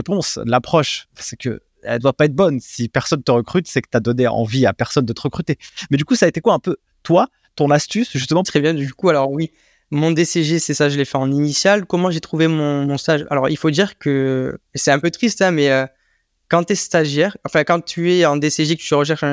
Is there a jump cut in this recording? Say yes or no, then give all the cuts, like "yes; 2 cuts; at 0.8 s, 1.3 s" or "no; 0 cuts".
yes; 1 cut; at 8.4 s